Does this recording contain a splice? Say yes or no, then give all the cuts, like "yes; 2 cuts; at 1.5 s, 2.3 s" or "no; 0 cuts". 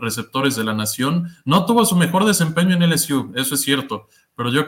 no; 0 cuts